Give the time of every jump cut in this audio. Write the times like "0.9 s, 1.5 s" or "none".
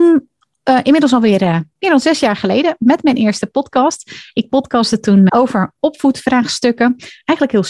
5.3 s